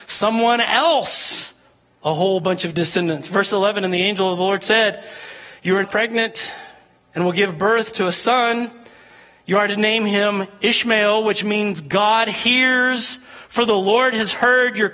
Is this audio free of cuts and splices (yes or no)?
no